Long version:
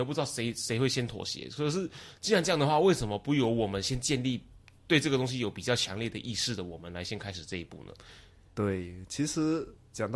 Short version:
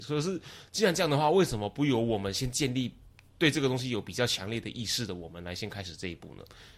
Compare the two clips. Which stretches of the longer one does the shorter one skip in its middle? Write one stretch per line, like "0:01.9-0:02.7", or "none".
none